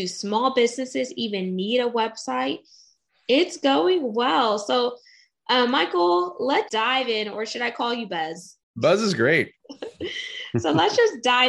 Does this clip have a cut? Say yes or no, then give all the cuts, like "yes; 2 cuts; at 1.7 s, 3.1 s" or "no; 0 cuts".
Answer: yes; 2 cuts; at 3.1 s, 6.7 s